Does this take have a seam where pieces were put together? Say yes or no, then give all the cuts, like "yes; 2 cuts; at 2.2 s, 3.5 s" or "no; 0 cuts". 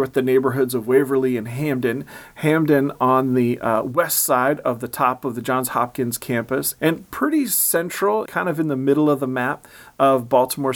yes; 2 cuts; at 6.8 s, 8.3 s